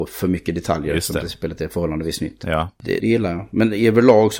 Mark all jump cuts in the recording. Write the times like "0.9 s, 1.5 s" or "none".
3.0 s